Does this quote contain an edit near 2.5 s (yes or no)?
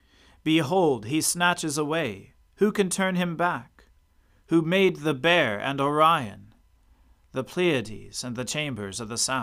no